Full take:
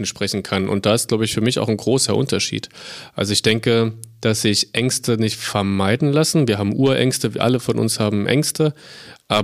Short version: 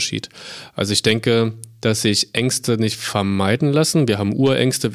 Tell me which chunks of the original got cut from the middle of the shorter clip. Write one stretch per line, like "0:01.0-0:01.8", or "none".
none